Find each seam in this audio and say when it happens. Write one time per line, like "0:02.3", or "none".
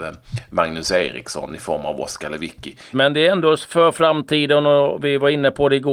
0:02.9